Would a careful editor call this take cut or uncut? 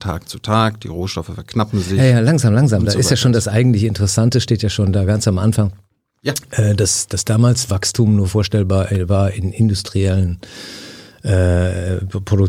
uncut